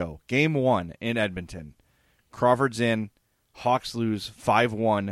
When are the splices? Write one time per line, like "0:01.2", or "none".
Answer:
none